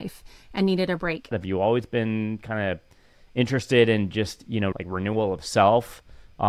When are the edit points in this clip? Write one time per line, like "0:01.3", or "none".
0:01.3
0:04.7